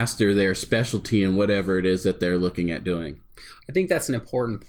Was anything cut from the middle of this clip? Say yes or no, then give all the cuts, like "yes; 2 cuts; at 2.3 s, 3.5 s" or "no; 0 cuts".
no; 0 cuts